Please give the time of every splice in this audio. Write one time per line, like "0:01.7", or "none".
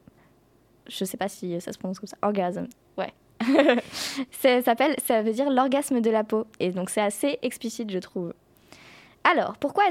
none